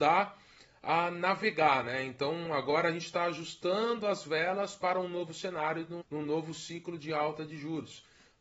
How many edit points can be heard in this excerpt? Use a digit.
1